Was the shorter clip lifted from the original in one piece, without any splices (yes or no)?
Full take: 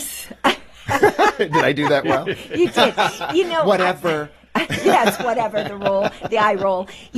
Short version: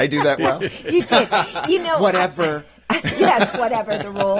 yes